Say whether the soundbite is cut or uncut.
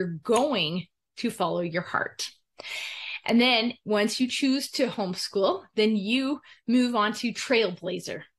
uncut